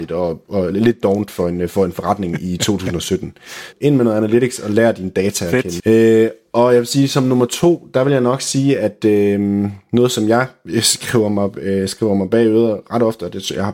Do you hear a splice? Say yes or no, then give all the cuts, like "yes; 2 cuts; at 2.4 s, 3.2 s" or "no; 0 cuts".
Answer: yes; 2 cuts; at 3.7 s, 5.8 s